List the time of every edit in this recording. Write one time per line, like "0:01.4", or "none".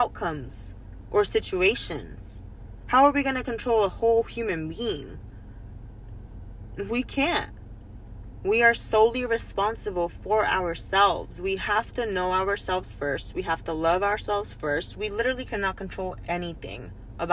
0:14.9